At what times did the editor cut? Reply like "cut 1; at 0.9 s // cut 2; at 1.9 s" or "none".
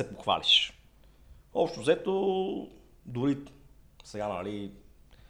none